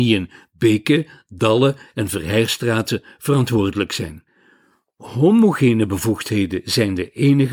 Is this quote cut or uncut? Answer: uncut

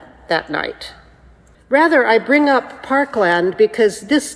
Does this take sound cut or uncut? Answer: cut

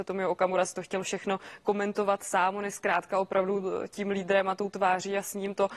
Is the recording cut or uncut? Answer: uncut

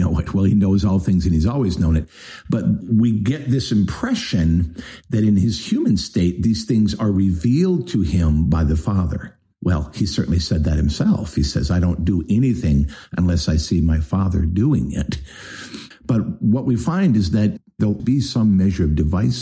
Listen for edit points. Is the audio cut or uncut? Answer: cut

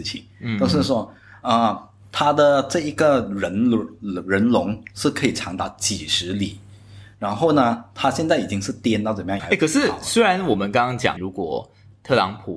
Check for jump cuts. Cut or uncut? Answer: cut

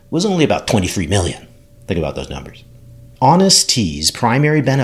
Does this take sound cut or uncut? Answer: uncut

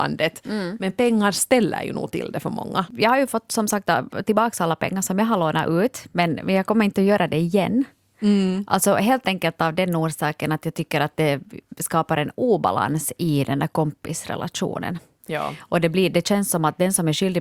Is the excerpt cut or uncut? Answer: cut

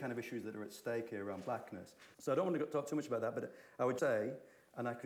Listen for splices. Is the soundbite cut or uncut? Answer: cut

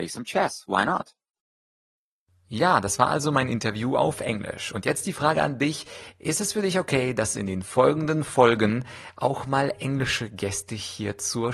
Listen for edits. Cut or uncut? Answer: uncut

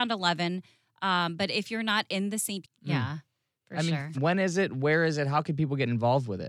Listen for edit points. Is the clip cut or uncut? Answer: cut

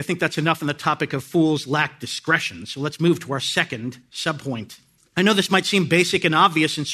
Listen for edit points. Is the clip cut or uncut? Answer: cut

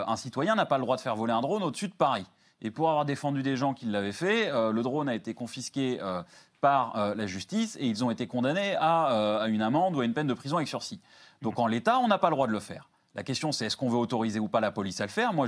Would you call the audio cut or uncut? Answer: uncut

